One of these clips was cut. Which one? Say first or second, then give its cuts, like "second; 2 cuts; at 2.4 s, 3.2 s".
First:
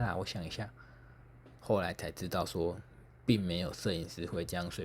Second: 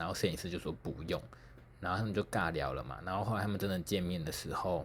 first; 1 cut; at 1.6 s